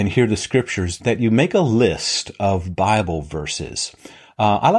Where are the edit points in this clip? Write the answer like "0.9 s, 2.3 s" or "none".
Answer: 1.0 s

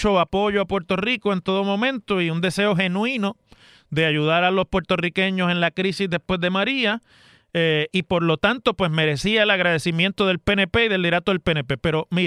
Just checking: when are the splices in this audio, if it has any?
none

